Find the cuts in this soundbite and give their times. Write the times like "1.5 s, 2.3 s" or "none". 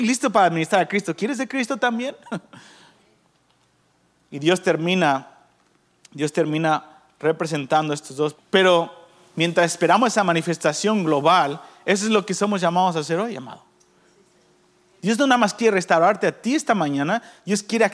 8.4 s